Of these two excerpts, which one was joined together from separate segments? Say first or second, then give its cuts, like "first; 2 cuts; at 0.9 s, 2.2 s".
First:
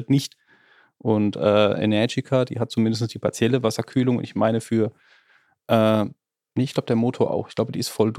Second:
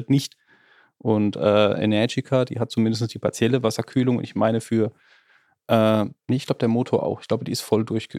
second; 1 cut; at 6.2 s